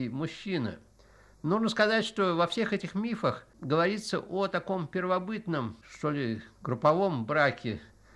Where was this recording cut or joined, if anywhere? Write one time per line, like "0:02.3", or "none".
none